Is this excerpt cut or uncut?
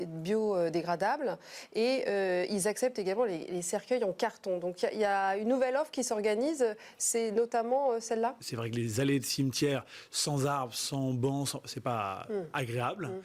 cut